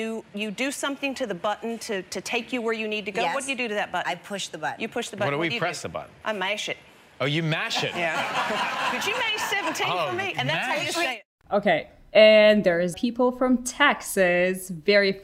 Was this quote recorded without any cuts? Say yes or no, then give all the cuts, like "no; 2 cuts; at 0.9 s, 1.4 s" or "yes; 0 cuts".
no; 1 cut; at 12.9 s